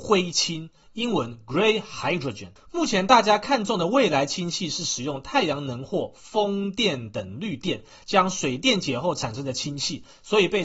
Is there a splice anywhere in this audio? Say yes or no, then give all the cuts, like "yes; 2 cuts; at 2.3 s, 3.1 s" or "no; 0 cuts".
no; 0 cuts